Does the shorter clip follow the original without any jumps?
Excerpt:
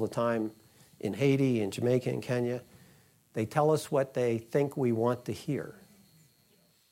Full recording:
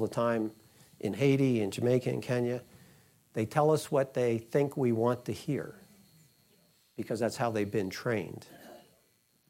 yes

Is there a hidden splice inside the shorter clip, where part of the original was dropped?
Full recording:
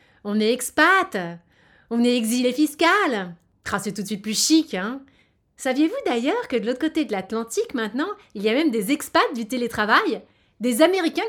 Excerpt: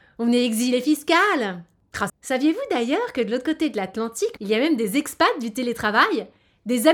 yes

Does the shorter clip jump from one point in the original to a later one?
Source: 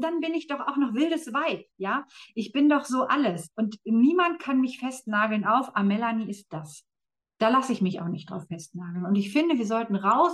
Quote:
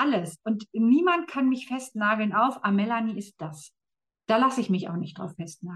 no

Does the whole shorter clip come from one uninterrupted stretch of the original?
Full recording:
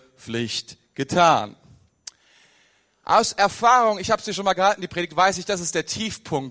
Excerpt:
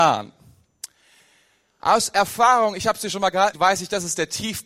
no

